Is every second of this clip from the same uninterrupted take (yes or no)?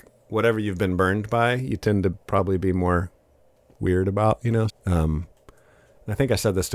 no